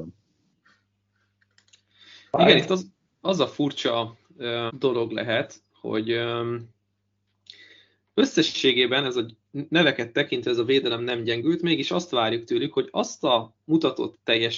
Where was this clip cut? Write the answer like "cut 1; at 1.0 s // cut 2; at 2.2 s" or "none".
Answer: cut 1; at 4.7 s